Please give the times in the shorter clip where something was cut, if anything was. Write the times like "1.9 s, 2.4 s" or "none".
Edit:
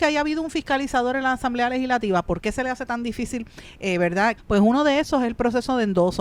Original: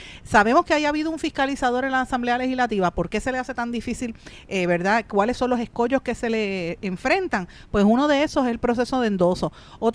4.4 s

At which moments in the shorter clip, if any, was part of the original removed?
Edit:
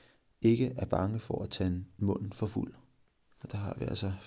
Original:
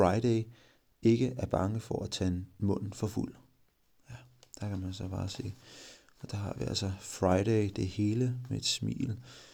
3.3 s

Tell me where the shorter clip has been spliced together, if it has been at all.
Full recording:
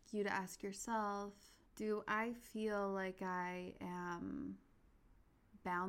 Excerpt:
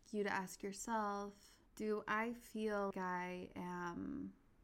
2.9 s

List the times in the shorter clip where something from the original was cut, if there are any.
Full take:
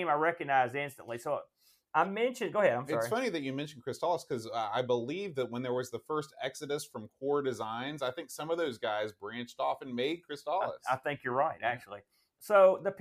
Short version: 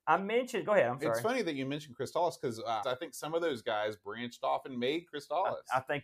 2.8 s

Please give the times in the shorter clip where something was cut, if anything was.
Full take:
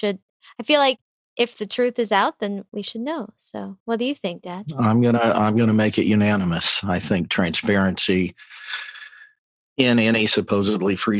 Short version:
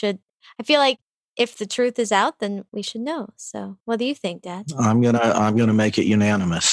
none

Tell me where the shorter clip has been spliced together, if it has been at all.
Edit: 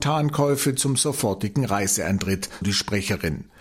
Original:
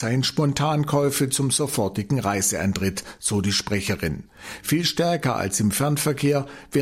2.6 s

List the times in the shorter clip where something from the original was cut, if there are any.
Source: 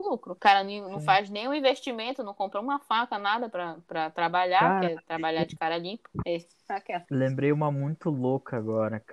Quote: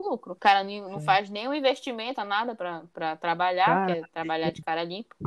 2.2 s

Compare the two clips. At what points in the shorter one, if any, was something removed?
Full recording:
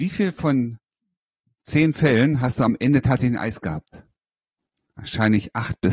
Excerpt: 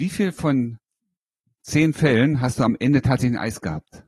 none

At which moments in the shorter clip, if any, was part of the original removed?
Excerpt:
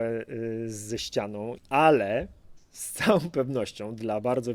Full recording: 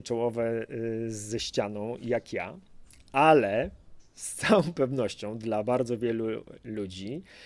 1.6 s

